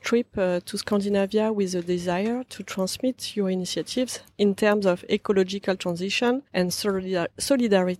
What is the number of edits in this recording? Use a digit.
1